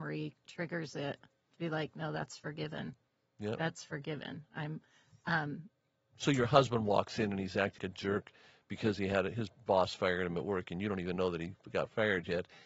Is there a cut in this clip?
yes; 1 cut; at 7.8 s

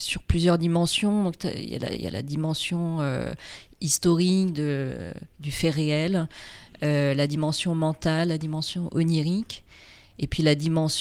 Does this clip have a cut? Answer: no; 0 cuts

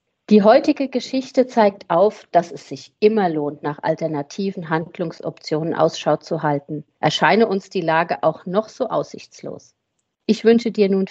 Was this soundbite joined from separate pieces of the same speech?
no; 0 cuts

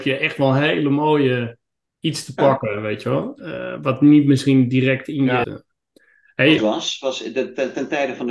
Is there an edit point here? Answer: yes; 2 cuts; at 5.4 s, 6.6 s

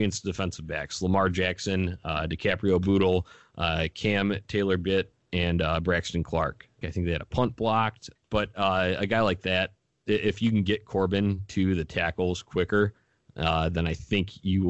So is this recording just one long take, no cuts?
no; 2 cuts; at 6.8 s, 8.2 s

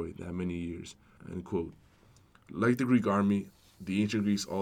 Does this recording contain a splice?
yes; 1 cut; at 1.2 s

